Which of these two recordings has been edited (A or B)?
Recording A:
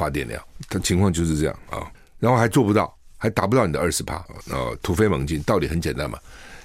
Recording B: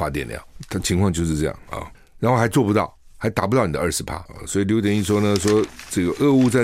A